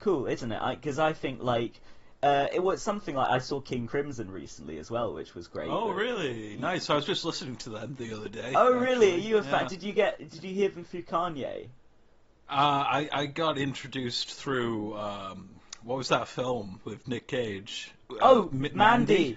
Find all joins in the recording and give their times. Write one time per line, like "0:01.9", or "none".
none